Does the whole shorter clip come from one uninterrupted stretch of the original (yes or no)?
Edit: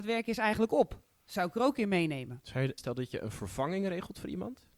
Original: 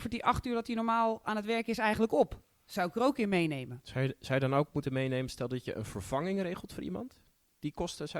no